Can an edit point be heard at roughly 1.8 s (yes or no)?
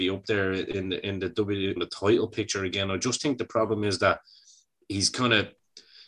yes